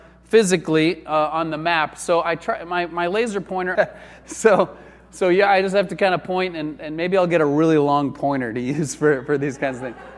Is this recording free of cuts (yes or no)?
no